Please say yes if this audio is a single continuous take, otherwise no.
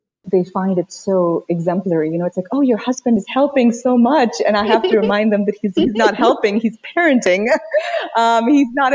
yes